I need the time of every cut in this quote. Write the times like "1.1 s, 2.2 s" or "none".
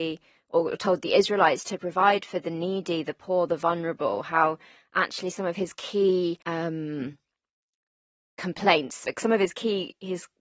6.4 s, 9.0 s